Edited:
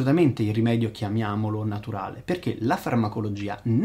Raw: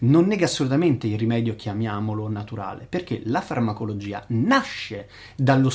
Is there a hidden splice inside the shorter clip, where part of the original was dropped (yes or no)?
no